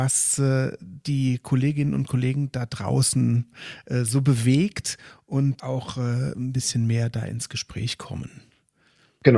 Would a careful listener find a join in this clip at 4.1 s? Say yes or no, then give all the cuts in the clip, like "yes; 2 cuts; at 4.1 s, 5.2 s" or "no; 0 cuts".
no; 1 cut; at 5.6 s